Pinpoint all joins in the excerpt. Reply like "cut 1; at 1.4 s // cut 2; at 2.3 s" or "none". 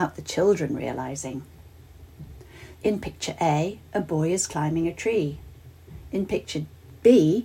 cut 1; at 2.7 s